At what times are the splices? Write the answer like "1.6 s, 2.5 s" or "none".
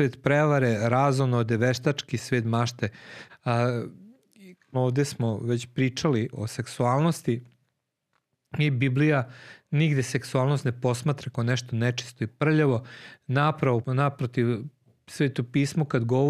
3.3 s, 4.7 s, 13.8 s